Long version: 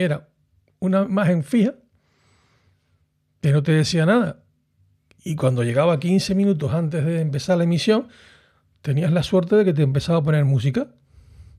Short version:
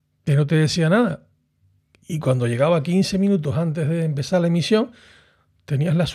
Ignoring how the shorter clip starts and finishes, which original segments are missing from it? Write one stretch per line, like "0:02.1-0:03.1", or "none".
none